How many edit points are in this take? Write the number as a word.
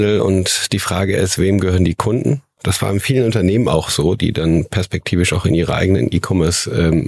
zero